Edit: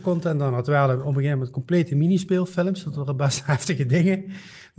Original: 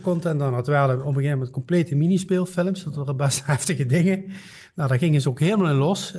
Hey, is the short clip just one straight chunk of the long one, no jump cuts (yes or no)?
yes